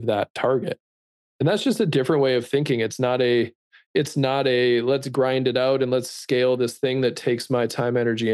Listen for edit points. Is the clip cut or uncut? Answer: uncut